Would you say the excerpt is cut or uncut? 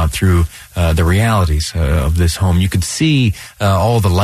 uncut